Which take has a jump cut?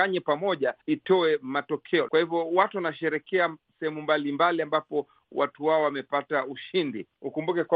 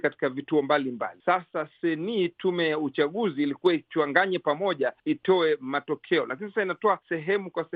first; 1 cut; at 2.1 s

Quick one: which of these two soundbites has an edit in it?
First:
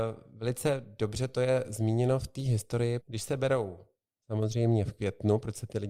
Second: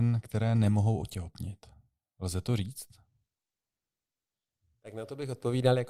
first; 1 cut; at 3.0 s

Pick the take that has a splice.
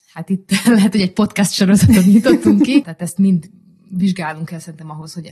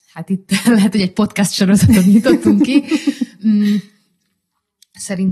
first; 1 cut; at 2.8 s

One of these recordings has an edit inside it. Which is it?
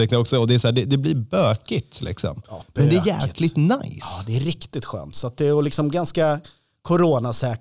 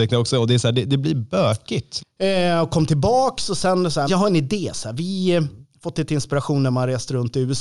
second; 2 cuts; at 2.0 s, 4.1 s

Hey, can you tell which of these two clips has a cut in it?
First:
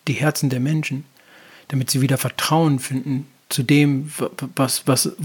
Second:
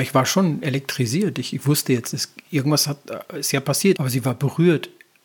second; 1 cut; at 4.0 s

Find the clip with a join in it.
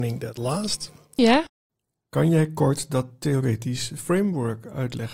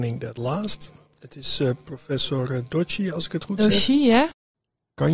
first; 1 cut; at 1.2 s

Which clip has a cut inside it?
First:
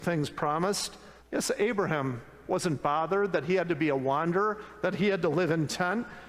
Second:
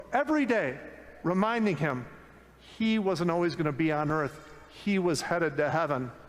first; 1 cut; at 1.2 s

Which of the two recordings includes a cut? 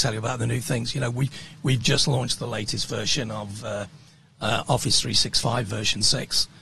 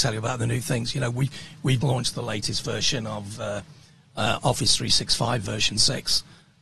second; 1 cut; at 1.8 s

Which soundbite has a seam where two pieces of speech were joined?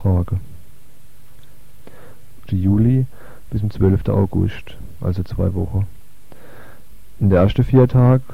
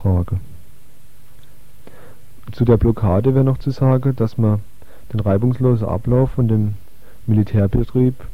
first; 1 cut; at 2.5 s

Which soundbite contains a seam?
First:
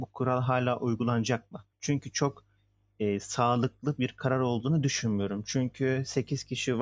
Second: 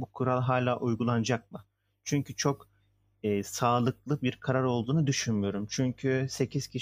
first; 1 cut; at 1.7 s

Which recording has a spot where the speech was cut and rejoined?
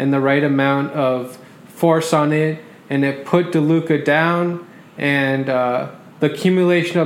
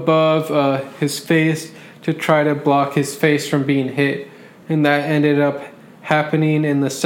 second; 1 cut; at 4.6 s

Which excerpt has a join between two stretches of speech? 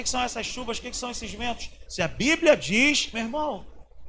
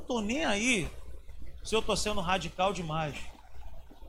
first; 2 cuts; at 1.9 s, 3.1 s

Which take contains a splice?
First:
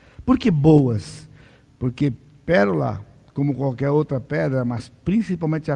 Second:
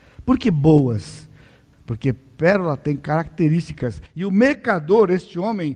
second; 1 cut; at 1.7 s

